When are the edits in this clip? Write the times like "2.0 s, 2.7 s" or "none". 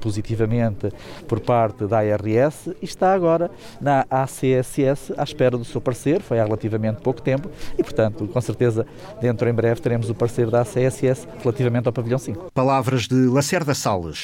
none